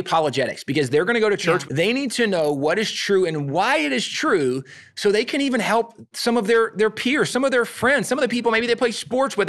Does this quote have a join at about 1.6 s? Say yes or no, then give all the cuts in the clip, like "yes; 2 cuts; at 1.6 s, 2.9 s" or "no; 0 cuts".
yes; 1 cut; at 1.6 s